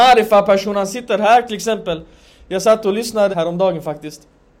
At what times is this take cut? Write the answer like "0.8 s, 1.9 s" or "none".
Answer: 3.3 s